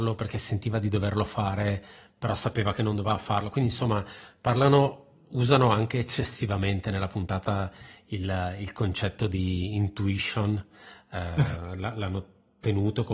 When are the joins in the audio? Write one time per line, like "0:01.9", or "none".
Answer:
none